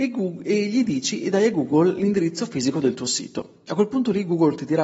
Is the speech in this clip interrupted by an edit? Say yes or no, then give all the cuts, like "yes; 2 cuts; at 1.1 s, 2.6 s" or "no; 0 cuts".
no; 0 cuts